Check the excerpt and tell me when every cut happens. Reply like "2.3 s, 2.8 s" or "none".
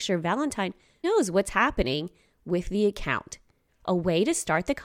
1.0 s, 3.7 s